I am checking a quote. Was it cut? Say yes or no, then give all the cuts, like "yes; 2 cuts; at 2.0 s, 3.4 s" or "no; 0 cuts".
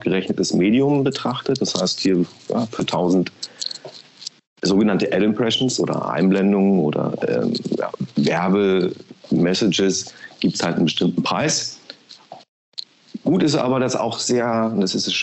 no; 0 cuts